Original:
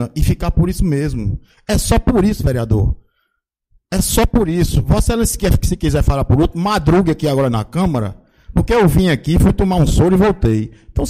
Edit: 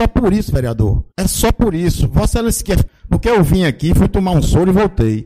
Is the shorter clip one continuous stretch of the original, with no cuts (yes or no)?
no